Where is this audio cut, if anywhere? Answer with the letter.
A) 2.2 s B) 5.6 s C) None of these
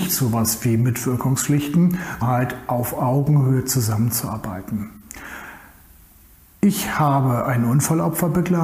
A